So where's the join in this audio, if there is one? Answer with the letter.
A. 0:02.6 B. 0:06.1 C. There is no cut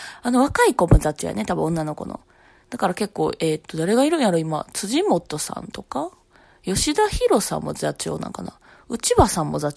A